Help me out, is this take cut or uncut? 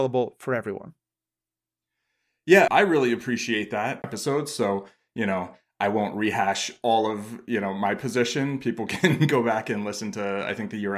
cut